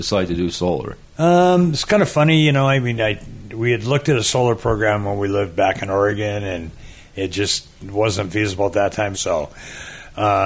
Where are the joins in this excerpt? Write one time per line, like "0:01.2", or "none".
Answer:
0:09.1